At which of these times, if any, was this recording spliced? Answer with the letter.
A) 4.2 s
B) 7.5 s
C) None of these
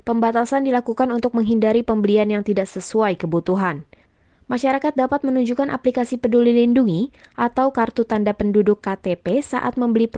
C